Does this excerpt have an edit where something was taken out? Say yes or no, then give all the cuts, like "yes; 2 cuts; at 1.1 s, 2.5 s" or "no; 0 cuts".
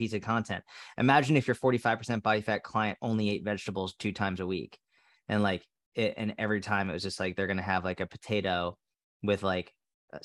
no; 0 cuts